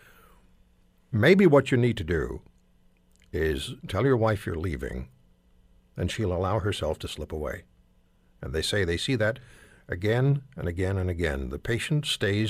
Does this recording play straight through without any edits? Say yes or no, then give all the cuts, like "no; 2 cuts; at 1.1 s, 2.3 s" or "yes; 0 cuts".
no; 1 cut; at 3.8 s